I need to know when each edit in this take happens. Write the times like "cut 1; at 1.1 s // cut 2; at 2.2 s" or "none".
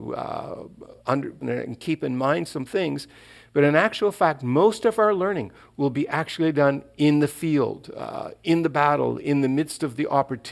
cut 1; at 1.4 s